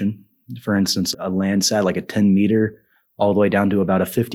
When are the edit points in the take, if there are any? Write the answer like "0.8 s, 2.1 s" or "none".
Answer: 1.1 s